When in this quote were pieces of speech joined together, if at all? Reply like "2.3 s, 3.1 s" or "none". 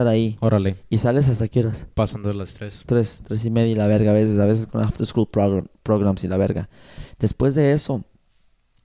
1.9 s